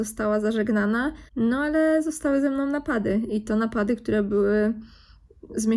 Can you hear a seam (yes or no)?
yes